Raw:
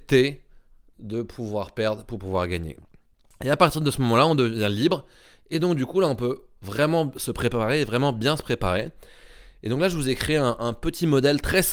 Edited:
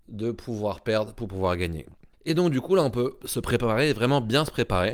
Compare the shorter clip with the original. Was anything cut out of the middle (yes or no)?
yes